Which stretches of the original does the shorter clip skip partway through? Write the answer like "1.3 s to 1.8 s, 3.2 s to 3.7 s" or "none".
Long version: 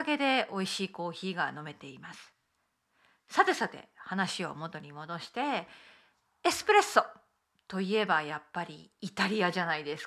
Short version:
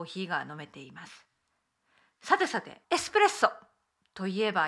3.9 s to 6.4 s